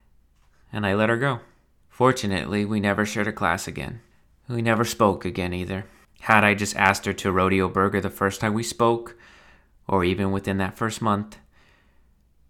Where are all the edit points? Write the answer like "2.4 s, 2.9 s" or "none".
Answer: 1.8 s, 6.0 s